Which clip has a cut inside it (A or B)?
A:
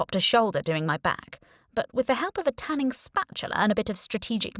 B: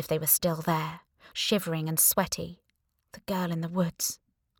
B